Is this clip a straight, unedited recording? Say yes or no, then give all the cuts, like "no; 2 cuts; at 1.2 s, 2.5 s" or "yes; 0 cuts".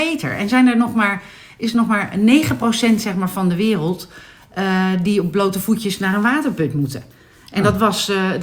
yes; 0 cuts